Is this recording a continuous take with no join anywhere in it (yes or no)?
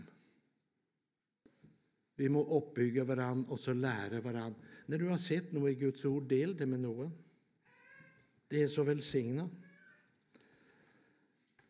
yes